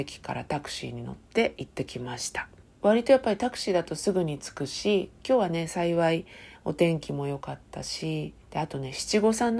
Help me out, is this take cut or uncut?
cut